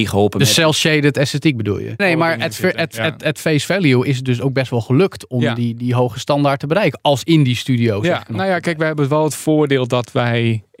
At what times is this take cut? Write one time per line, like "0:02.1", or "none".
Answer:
0:02.0